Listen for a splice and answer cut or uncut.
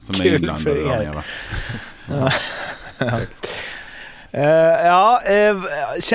uncut